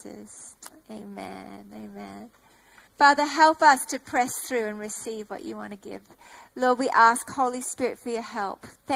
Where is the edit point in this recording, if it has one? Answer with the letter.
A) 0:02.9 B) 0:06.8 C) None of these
A